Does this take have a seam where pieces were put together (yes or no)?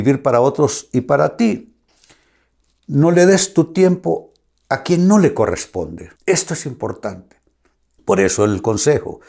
yes